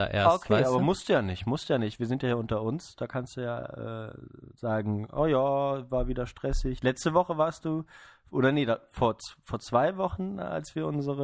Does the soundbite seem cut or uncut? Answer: uncut